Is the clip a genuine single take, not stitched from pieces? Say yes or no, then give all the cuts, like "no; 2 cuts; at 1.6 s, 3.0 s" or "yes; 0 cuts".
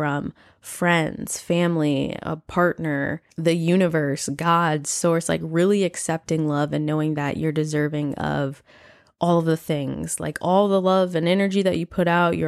yes; 0 cuts